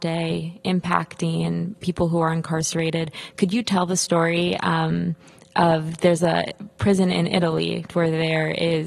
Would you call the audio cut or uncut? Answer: cut